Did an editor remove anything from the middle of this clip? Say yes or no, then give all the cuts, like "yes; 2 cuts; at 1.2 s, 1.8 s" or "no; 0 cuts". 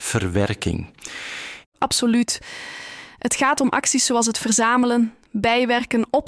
yes; 1 cut; at 1.6 s